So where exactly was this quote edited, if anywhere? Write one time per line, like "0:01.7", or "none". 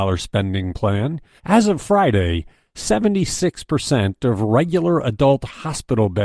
0:01.4